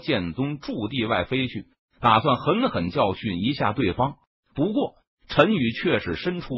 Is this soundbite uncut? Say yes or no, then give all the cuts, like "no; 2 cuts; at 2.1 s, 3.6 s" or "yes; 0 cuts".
yes; 0 cuts